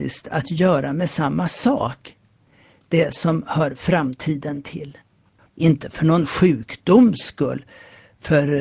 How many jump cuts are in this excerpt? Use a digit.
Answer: 1